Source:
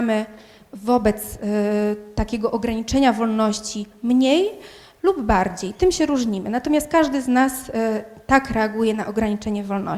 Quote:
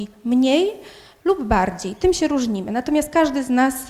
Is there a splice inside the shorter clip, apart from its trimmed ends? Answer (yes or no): no